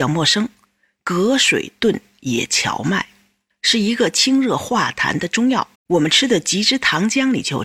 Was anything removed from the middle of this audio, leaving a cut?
yes; 2 cuts; at 3.5 s, 5.7 s

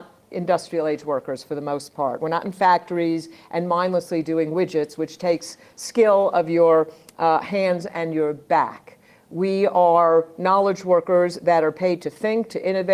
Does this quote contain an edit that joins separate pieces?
no; 0 cuts

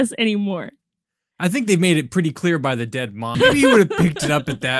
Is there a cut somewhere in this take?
yes; 1 cut; at 3.3 s

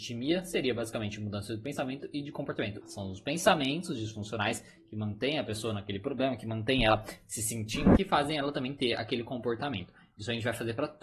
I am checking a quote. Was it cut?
yes; 2 cuts; at 2.8 s, 8.0 s

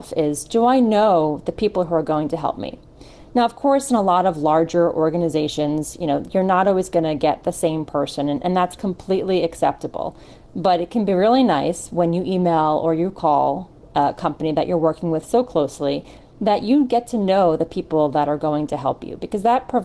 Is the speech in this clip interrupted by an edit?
no; 0 cuts

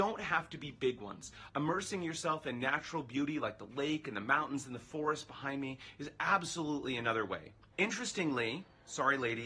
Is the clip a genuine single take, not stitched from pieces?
no; 2 cuts; at 1.5 s, 7.7 s

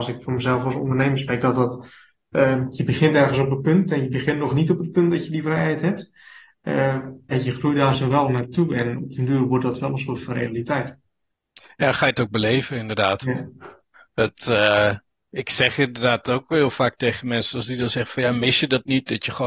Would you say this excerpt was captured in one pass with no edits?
no; 1 cut; at 7.3 s

